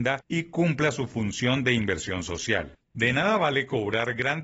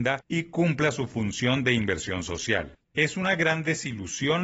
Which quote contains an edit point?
second; 1 cut; at 2.9 s

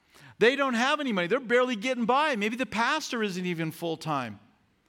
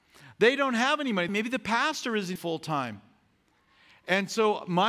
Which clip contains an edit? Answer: second; 2 cuts; at 1.3 s, 2.4 s

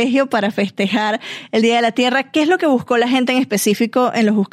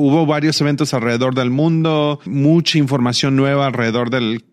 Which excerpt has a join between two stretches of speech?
second; 1 cut; at 2.3 s

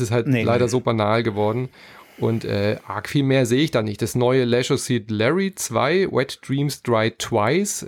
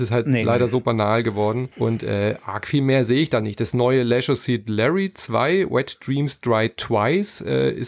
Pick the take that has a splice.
second; 1 cut; at 1.7 s

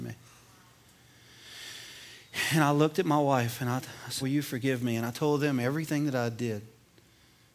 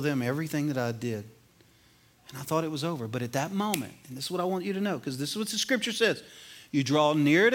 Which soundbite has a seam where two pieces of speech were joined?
first; 1 cut; at 4.2 s

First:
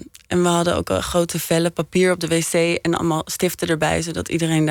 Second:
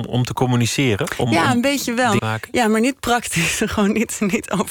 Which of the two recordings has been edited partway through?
second; 1 cut; at 2.2 s

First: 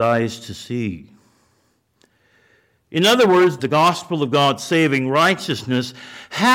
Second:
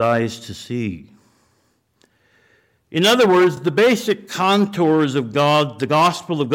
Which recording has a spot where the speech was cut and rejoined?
first; 1 cut; at 3.6 s

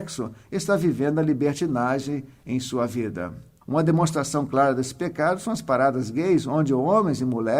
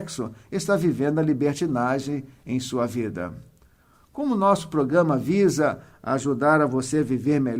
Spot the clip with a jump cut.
first; 1 cut; at 3.6 s

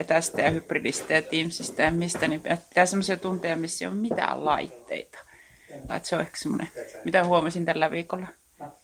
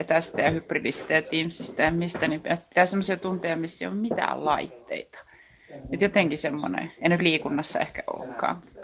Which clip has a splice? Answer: first; 1 cut; at 5.9 s

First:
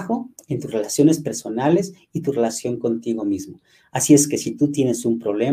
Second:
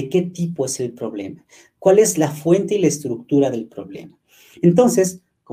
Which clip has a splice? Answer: second; 1 cut; at 4.5 s

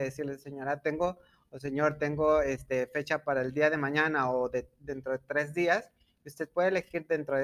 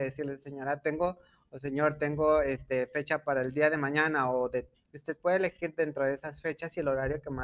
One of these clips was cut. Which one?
second; 1 cut; at 4.7 s

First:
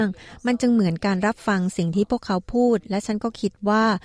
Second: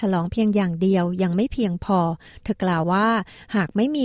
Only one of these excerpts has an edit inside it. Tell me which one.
second; 1 cut; at 2.8 s

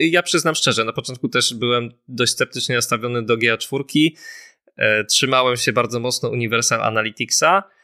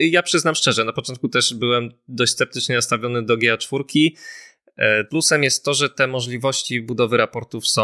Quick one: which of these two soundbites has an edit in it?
second; 1 cut; at 5.1 s

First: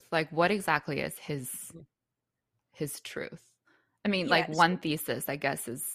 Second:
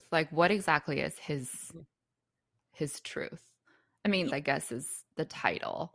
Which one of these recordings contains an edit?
second; 1 cut; at 4.3 s

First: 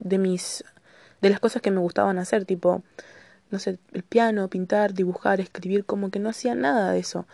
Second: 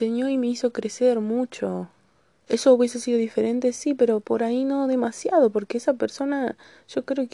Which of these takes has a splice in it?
second; 1 cut; at 2.4 s

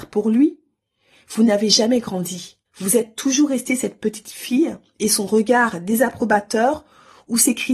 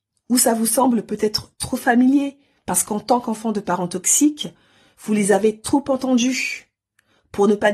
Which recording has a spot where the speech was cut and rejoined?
first; 1 cut; at 2.7 s

